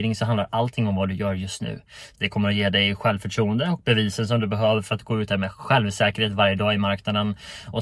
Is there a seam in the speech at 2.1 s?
yes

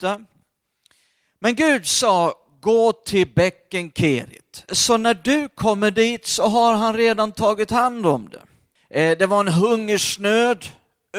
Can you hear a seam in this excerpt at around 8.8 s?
yes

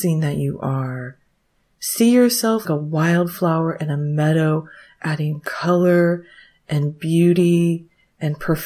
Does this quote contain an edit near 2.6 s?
yes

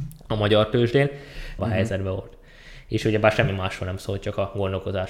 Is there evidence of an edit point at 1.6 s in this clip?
yes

